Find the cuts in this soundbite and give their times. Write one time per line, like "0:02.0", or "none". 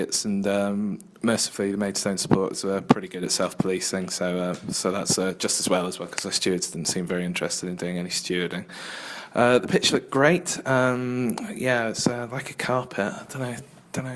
none